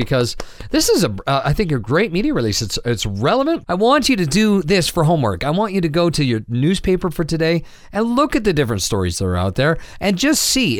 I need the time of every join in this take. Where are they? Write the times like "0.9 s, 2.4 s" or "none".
3.7 s